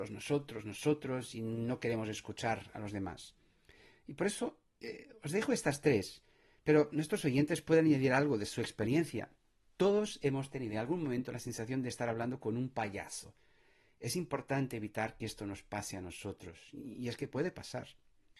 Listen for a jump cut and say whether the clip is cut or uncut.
uncut